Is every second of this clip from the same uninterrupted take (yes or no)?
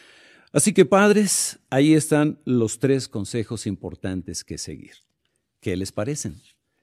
yes